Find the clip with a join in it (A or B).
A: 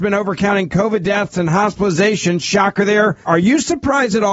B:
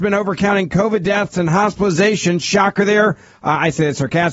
A